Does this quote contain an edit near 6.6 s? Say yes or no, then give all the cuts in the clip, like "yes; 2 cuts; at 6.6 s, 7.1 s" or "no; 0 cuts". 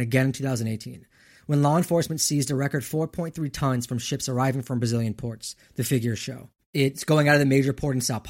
yes; 1 cut; at 6.6 s